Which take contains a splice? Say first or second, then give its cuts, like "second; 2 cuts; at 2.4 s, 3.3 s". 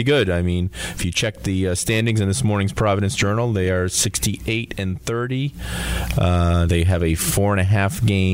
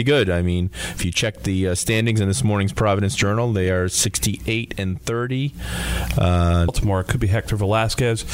second; 1 cut; at 6.7 s